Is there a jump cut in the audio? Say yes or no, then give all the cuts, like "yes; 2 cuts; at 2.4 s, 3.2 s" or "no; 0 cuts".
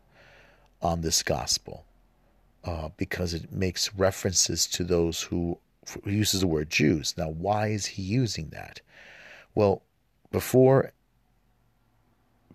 no; 0 cuts